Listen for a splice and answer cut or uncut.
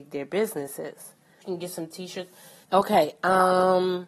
cut